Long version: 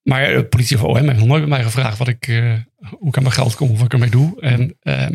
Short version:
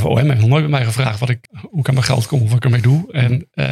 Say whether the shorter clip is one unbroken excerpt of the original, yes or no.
no